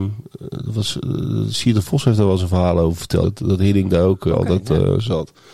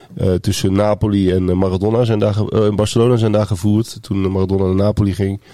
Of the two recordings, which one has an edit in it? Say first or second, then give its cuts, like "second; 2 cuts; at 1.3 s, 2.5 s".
first; 2 cuts; at 3.2 s, 4.3 s